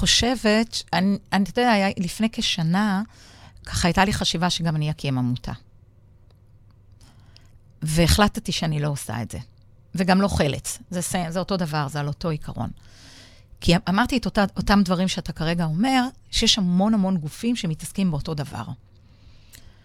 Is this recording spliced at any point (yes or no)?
no